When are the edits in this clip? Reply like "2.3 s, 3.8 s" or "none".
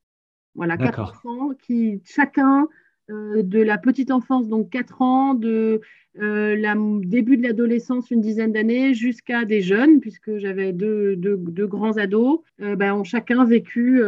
12.5 s